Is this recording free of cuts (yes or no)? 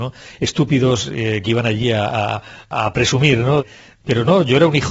yes